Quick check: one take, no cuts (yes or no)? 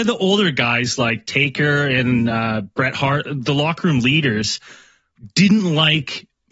yes